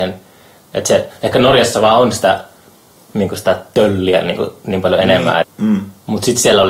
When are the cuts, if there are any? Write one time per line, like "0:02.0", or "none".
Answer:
0:05.4